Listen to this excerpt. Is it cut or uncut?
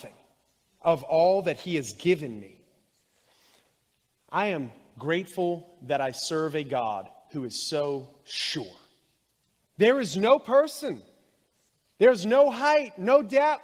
cut